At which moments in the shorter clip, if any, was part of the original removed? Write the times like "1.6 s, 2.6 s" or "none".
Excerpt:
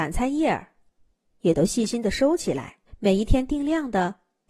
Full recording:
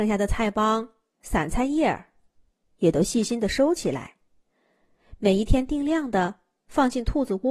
2.9 s